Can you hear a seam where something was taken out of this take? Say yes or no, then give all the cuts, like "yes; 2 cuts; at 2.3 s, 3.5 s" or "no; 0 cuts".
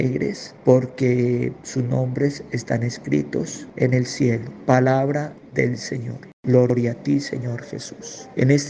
no; 0 cuts